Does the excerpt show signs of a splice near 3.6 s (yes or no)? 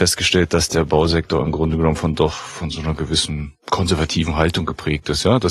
yes